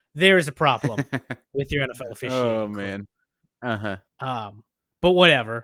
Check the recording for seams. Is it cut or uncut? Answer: cut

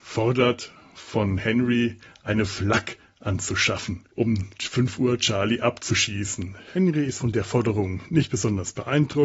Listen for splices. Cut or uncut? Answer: uncut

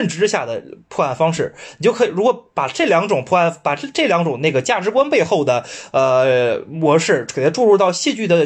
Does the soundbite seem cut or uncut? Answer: uncut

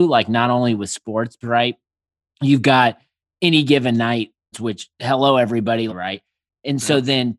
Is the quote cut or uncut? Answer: cut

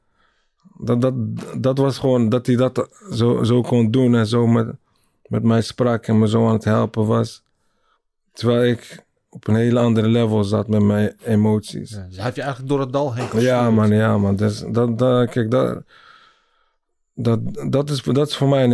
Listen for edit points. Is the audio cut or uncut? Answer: uncut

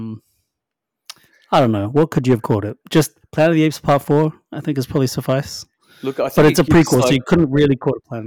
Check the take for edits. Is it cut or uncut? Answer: uncut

